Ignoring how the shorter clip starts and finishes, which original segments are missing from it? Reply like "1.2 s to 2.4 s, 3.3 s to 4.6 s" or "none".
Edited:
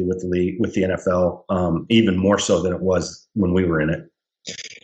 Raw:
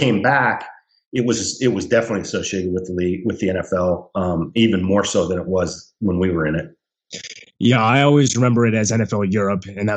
none

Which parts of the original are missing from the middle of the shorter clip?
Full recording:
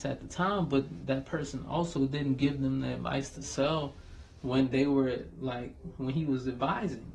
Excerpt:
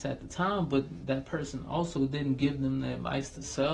none

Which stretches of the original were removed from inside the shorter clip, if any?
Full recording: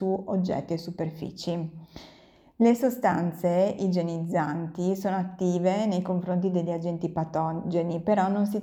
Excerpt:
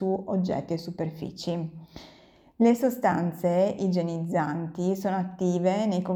none

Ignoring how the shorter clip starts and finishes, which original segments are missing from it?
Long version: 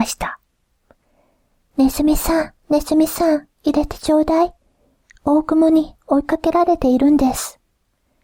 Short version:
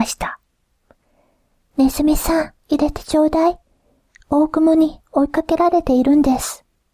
2.6 s to 3.6 s

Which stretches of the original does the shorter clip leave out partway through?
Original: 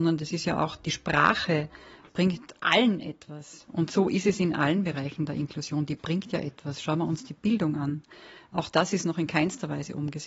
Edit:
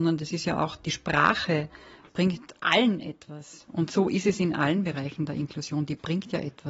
none

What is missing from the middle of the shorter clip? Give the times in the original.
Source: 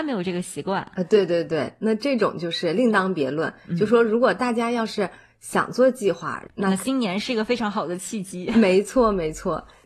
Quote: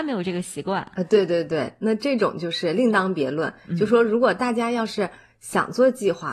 none

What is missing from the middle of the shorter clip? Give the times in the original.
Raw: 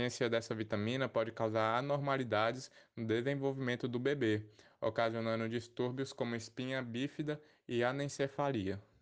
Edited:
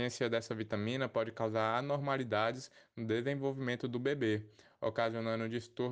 none

